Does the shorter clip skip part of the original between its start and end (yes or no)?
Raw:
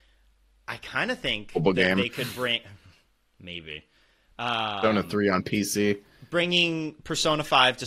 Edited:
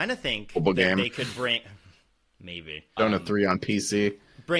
yes